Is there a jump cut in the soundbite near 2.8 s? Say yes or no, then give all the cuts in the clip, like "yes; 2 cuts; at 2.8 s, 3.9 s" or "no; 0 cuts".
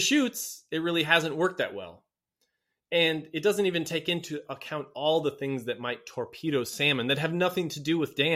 no; 0 cuts